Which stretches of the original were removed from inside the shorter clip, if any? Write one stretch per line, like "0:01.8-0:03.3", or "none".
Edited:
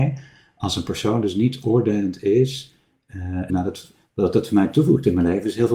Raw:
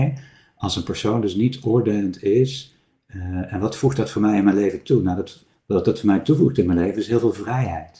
0:03.5-0:05.0